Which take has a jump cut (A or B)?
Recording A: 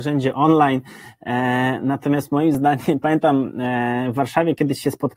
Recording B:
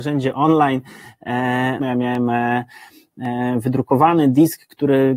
B